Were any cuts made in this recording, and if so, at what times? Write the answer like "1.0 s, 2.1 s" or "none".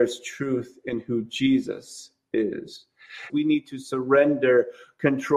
3.3 s